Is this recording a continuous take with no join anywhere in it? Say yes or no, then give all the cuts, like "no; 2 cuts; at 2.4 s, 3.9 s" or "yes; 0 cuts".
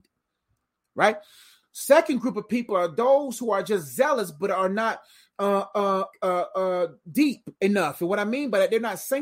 no; 2 cuts; at 6.1 s, 7.6 s